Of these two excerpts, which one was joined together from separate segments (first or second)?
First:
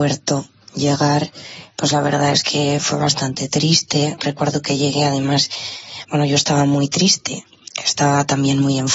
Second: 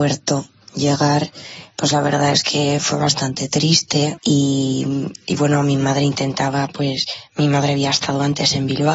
second